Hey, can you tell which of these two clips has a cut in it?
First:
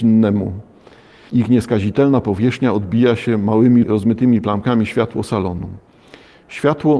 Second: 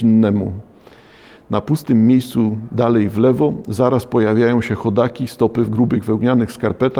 first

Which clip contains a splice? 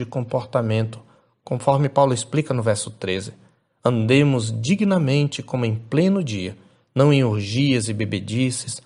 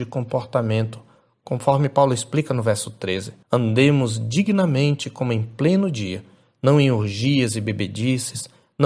second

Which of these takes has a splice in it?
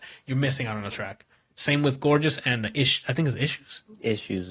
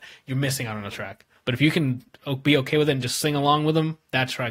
first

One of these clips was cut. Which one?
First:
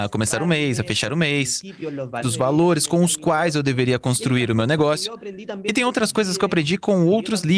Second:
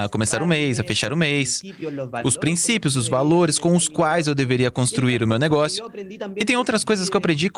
first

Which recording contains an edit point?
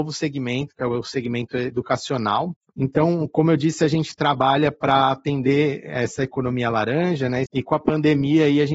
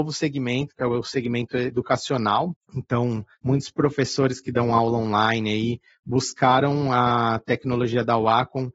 first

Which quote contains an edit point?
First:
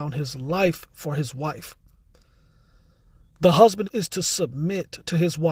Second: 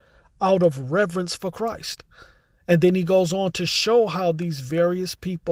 first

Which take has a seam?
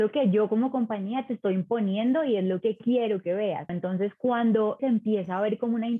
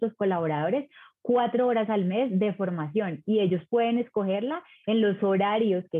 first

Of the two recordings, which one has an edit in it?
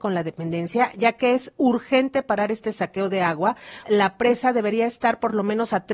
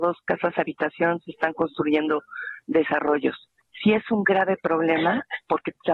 first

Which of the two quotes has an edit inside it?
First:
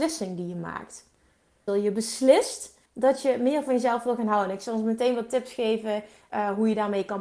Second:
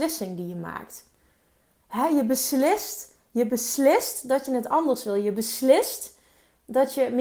first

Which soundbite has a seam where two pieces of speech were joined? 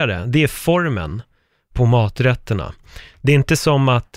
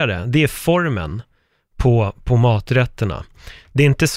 first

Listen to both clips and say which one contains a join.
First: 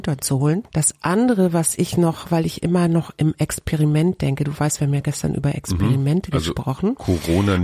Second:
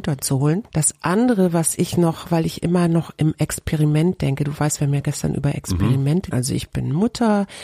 second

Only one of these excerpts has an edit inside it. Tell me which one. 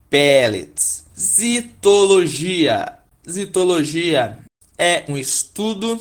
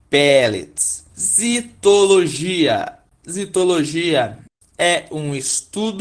first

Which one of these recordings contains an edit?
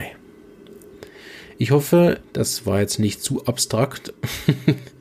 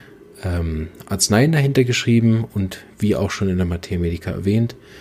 first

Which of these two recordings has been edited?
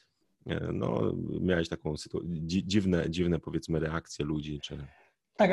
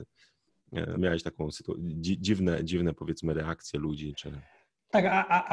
second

